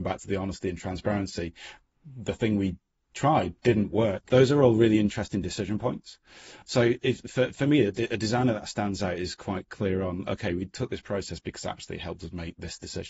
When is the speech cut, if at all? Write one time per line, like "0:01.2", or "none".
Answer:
0:04.3
0:06.6